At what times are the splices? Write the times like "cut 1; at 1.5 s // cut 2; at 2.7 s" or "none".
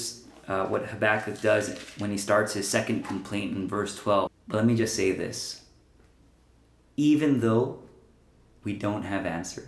cut 1; at 4.3 s